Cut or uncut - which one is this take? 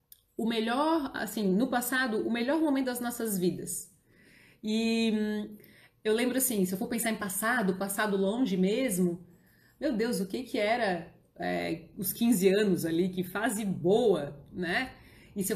uncut